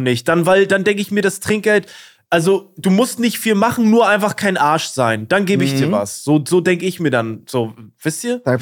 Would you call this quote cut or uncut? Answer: uncut